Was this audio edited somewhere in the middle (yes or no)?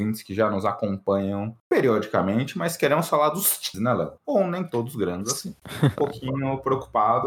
yes